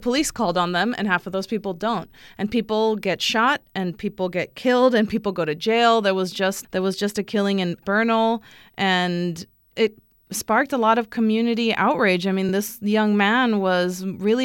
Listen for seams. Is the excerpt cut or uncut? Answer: uncut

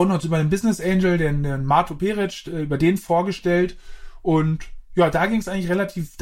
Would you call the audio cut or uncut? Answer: cut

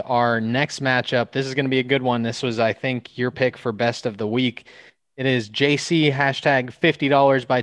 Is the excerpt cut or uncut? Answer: uncut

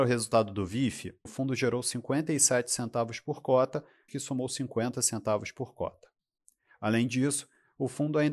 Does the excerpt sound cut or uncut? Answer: cut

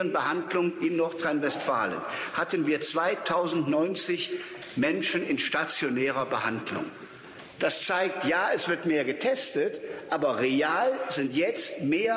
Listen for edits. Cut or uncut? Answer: cut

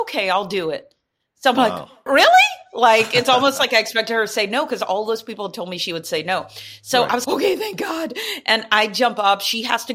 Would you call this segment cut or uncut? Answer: cut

